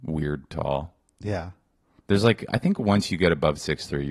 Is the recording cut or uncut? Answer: uncut